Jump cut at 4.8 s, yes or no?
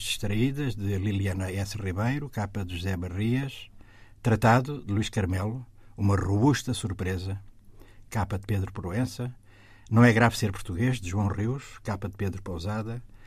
no